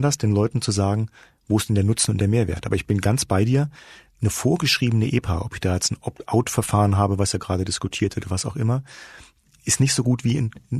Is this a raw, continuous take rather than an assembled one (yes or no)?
yes